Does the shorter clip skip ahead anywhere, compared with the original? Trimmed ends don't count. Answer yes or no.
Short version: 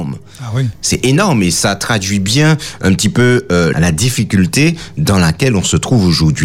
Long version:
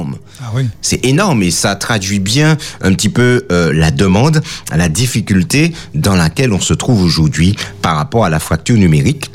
yes